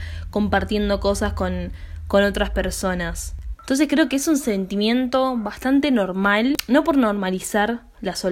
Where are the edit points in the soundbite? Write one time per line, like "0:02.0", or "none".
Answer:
0:03.5